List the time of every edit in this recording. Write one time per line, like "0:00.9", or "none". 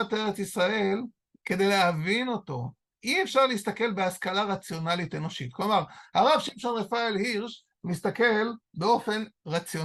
0:02.9